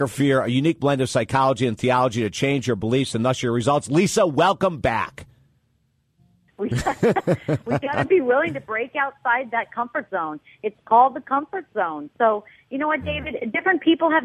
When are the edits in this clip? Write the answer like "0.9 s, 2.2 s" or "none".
6.5 s